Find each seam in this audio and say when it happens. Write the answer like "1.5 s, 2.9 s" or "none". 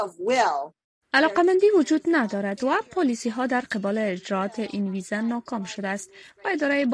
none